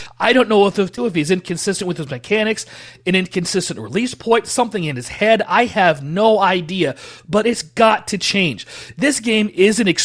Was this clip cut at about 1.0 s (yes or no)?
yes